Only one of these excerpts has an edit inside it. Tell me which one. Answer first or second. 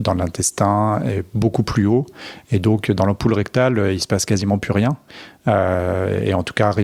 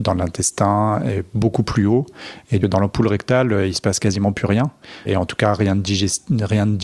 second